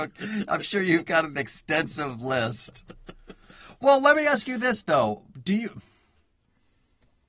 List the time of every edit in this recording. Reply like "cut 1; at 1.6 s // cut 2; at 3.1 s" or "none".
none